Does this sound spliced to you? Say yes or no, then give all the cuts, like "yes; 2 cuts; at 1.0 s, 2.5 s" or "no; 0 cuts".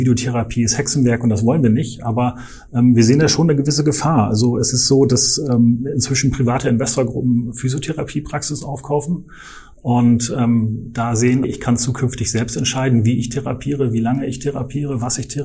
yes; 1 cut; at 11.4 s